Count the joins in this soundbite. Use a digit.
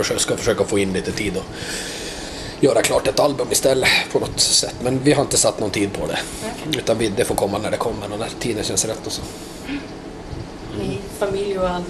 1